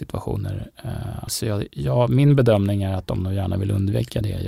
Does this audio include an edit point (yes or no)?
yes